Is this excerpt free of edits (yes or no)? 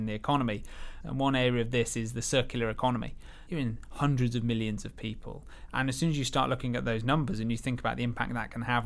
no